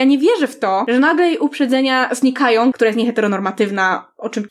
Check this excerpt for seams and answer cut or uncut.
cut